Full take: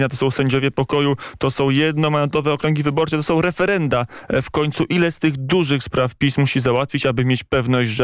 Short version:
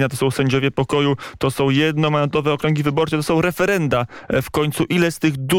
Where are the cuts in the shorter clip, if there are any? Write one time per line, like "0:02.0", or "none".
none